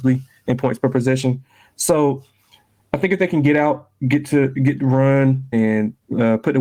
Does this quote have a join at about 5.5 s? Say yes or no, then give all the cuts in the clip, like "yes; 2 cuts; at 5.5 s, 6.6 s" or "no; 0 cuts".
yes; 1 cut; at 5.5 s